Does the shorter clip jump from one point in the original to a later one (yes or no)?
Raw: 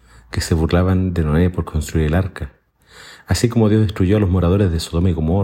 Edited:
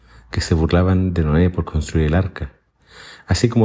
no